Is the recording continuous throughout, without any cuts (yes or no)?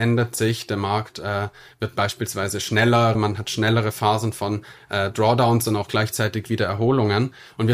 no